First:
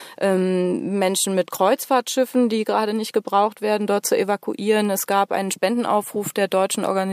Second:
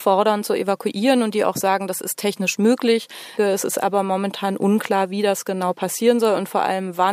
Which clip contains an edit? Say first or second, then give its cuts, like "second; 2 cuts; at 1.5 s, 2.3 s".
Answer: second; 1 cut; at 3.4 s